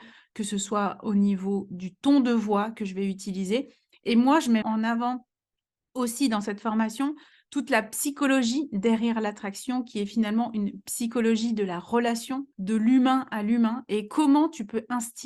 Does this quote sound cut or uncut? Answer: cut